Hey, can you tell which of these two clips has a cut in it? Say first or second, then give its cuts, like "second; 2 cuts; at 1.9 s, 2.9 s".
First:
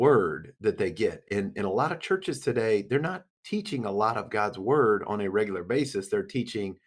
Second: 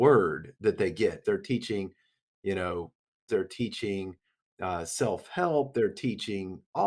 second; 2 cuts; at 1.2 s, 3.3 s